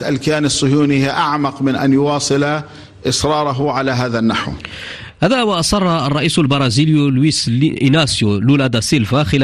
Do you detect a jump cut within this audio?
yes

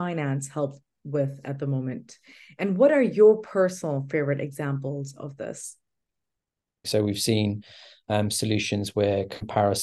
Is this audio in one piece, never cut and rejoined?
no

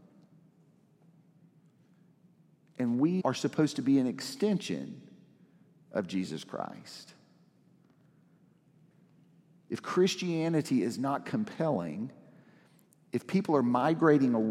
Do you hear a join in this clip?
yes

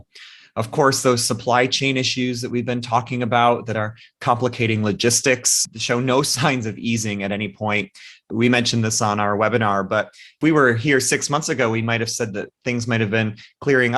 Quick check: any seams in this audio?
no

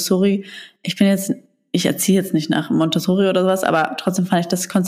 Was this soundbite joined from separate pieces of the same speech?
no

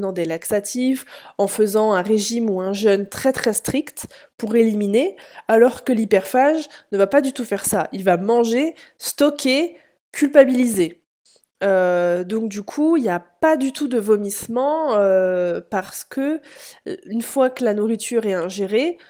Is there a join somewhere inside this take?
no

